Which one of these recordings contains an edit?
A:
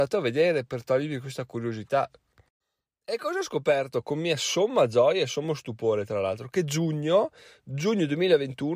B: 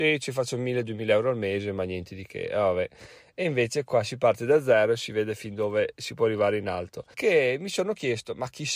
B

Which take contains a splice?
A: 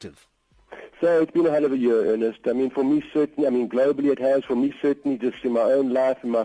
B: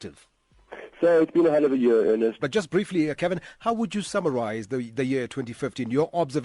B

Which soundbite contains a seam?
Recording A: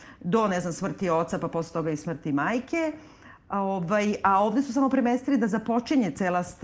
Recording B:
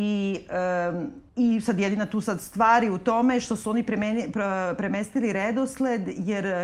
B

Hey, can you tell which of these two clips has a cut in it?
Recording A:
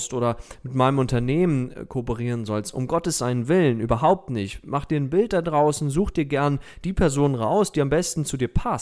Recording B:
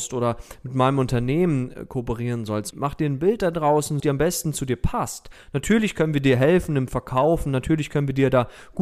B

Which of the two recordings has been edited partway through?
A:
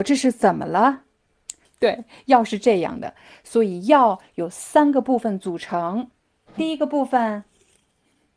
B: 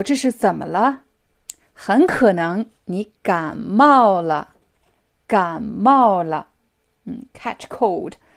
A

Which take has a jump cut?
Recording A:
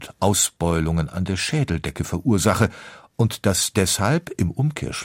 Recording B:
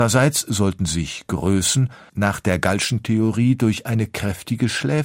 B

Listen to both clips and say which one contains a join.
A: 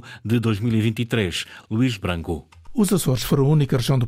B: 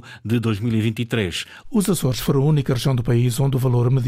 B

